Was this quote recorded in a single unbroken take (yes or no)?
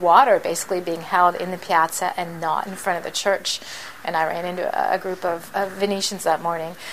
yes